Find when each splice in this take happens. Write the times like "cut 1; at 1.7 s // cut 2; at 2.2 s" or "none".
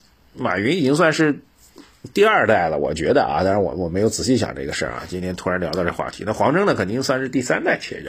none